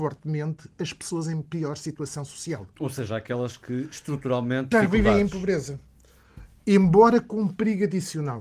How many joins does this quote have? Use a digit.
1